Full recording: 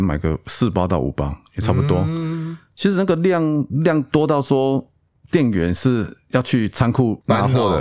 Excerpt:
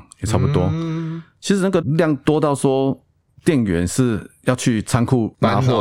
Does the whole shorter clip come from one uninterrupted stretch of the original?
no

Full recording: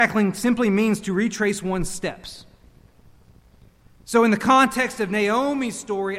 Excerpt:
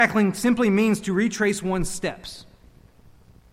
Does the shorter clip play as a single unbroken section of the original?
yes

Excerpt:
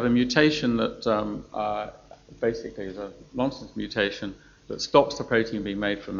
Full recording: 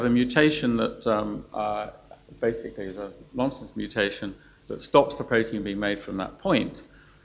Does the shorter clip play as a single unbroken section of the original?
yes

